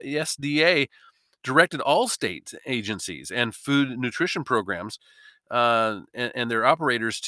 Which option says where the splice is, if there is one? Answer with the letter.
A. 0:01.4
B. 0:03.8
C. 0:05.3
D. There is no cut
D